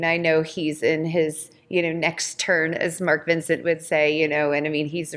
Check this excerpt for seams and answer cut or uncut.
uncut